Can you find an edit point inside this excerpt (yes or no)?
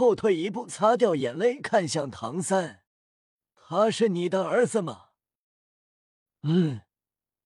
yes